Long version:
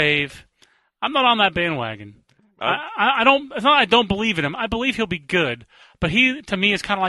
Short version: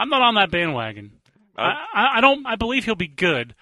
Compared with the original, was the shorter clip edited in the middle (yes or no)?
yes